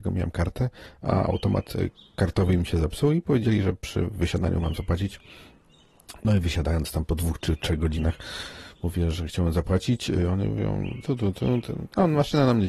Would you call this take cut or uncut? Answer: uncut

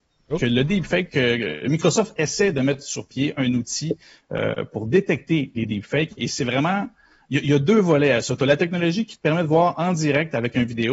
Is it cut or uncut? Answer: uncut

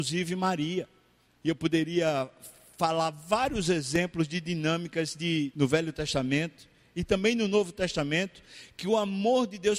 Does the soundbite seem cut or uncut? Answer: cut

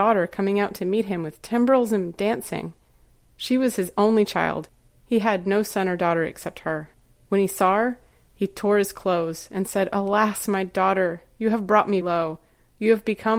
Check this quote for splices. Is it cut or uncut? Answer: cut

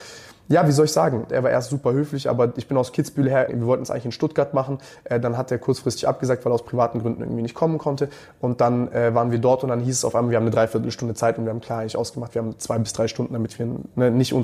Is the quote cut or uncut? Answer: cut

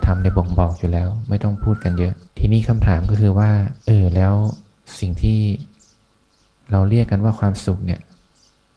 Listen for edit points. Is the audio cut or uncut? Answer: cut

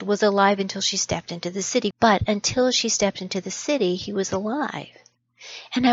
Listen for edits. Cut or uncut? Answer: cut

